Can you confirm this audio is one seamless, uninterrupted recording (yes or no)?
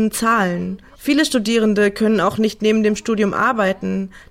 no